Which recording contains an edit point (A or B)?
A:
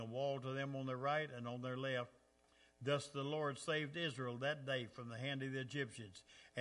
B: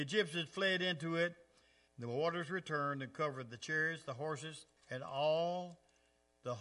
B